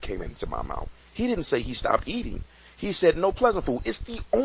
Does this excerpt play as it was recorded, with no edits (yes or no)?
yes